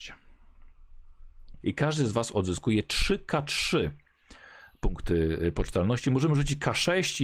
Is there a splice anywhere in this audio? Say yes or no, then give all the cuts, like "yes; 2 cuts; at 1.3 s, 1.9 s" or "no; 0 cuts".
yes; 1 cut; at 1.6 s